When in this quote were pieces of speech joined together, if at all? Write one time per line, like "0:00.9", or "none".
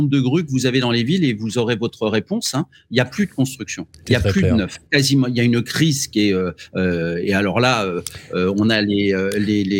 0:04.9